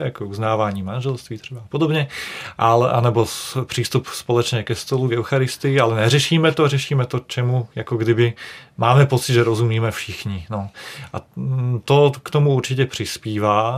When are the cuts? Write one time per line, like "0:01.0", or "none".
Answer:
none